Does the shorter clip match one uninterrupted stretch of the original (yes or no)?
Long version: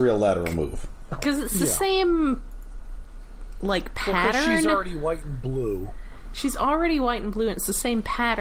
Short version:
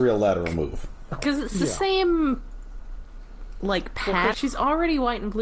no